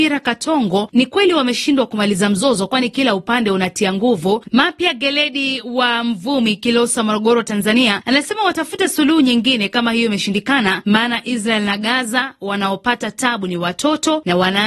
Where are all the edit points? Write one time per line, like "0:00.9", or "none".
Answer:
0:04.4